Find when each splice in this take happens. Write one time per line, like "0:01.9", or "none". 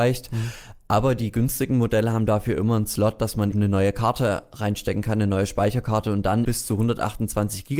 0:03.5
0:06.4